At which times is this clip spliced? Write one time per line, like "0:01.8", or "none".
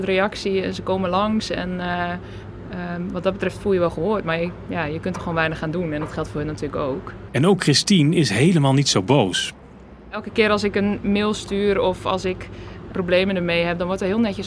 0:07.3
0:12.9